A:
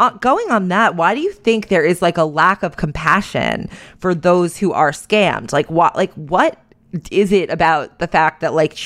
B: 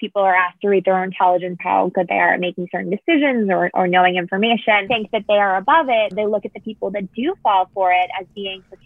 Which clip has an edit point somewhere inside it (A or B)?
B